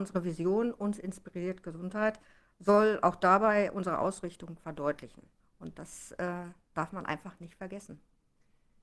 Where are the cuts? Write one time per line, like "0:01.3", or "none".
0:05.4